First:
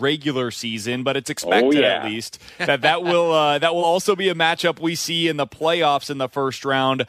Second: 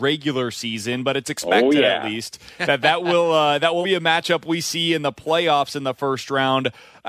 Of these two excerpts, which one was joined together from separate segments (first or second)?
second